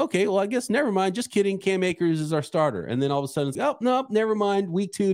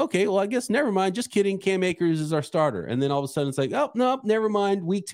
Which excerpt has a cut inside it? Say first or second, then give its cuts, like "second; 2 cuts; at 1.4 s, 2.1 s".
first; 1 cut; at 3.6 s